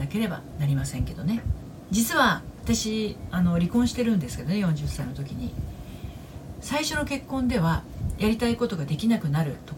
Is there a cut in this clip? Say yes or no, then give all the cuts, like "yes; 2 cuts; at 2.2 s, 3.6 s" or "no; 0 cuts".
yes; 1 cut; at 1.9 s